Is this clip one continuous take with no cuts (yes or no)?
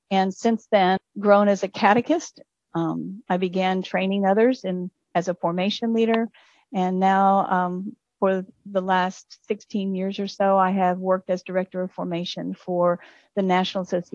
no